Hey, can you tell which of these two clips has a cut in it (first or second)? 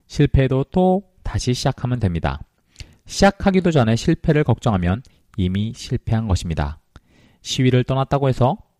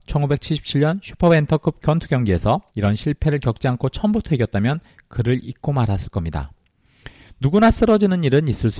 second